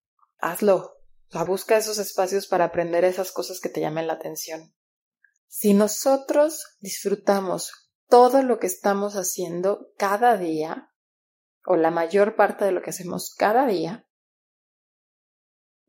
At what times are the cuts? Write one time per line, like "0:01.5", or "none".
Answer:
0:01.5
0:05.4